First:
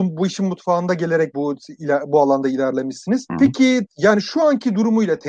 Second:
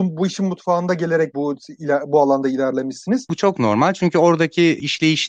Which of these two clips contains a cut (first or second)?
second